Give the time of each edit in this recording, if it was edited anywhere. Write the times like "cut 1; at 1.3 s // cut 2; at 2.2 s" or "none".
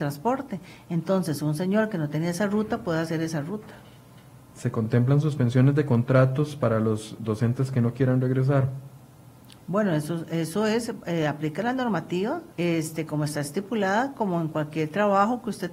cut 1; at 12.5 s